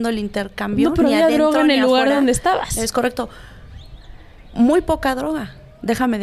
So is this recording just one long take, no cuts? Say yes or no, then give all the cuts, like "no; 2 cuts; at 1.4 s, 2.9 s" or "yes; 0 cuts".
yes; 0 cuts